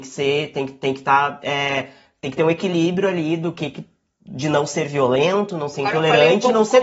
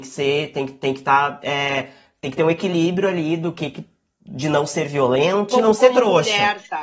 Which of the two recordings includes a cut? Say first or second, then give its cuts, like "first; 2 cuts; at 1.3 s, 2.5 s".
second; 1 cut; at 5.5 s